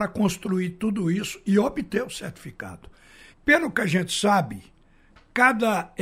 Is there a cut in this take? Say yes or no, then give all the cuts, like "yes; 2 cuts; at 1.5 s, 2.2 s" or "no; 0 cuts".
yes; 1 cut; at 3.3 s